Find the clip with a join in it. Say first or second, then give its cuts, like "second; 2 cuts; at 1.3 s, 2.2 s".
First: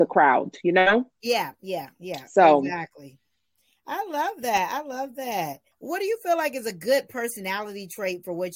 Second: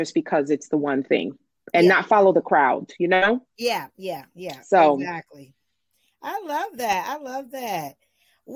first; 1 cut; at 5.7 s